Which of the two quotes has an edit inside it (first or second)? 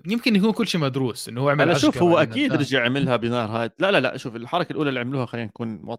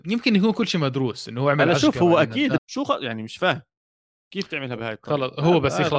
second